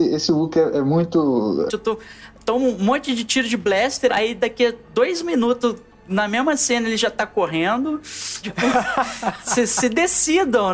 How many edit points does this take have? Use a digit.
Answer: 3